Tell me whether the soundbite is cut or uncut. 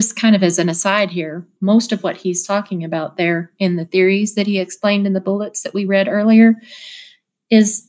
uncut